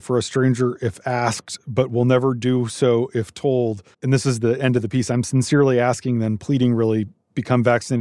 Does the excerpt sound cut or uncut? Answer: cut